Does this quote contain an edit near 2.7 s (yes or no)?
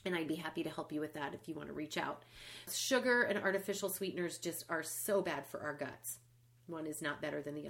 yes